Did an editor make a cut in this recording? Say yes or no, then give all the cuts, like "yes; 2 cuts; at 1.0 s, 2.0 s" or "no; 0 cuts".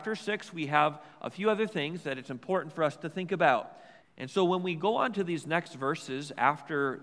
yes; 1 cut; at 4.0 s